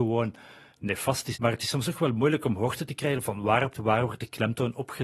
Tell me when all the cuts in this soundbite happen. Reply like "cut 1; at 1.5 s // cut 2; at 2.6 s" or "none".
cut 1; at 1.3 s // cut 2; at 3.7 s